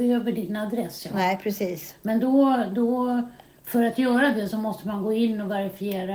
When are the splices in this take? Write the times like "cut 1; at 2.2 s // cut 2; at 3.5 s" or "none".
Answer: none